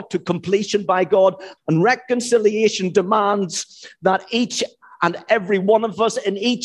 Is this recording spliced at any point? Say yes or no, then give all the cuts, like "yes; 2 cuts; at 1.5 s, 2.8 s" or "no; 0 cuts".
yes; 1 cut; at 1.6 s